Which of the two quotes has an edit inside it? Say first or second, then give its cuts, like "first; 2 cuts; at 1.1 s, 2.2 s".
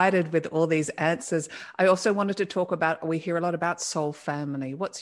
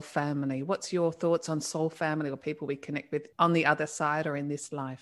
second; 1 cut; at 3.3 s